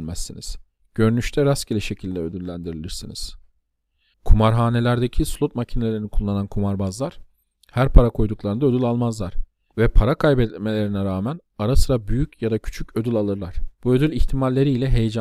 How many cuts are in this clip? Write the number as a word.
two